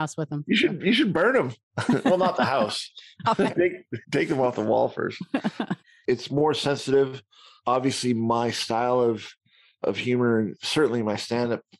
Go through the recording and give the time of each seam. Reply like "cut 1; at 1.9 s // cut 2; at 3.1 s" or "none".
cut 1; at 4.0 s // cut 2; at 6.1 s